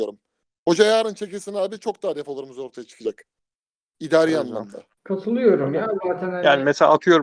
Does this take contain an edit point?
yes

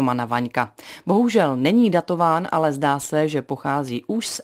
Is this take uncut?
yes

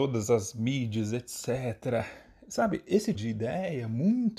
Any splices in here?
yes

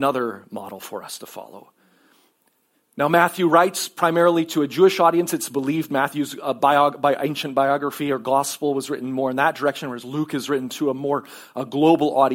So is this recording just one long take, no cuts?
yes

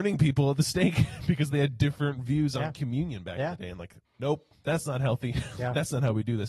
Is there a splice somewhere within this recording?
yes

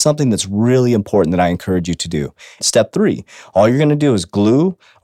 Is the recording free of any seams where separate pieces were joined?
no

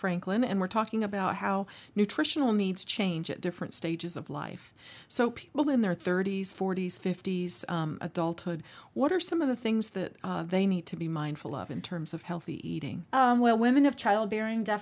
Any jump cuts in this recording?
no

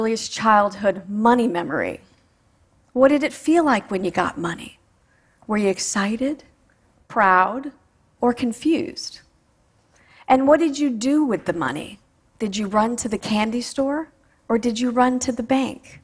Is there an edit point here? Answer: no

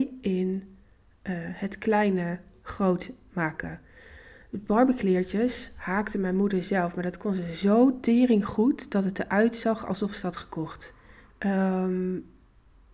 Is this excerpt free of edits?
no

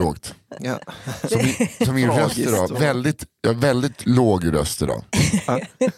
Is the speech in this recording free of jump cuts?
yes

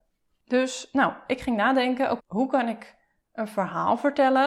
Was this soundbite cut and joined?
yes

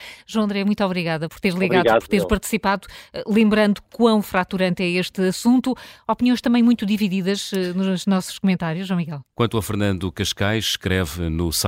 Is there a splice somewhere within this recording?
yes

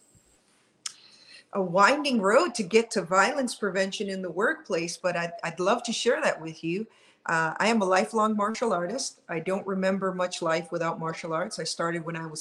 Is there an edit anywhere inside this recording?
no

